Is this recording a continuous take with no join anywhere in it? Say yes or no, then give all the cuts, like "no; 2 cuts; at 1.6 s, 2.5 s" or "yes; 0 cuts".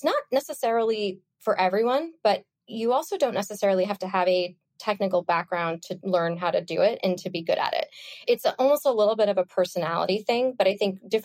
yes; 0 cuts